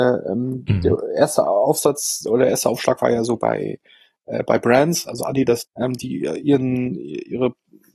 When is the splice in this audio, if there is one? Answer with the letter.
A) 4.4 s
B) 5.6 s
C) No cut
B